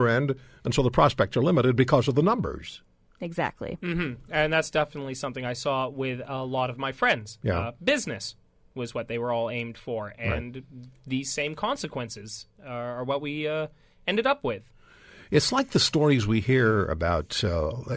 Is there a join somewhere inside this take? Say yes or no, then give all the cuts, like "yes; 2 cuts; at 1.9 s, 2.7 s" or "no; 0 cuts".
no; 0 cuts